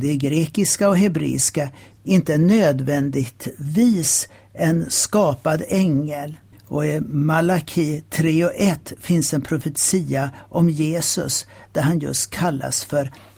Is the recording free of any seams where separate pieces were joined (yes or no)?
no